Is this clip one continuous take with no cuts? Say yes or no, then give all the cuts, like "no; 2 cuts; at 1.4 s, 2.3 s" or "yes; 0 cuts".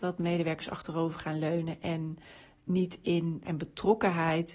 no; 1 cut; at 3.4 s